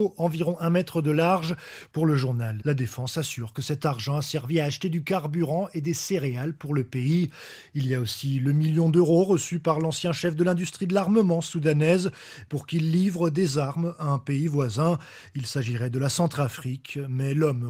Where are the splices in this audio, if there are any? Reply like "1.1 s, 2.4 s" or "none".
2.6 s